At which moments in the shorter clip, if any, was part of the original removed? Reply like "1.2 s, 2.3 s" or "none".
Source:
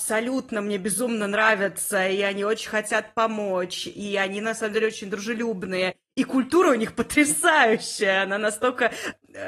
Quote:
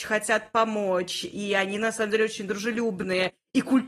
none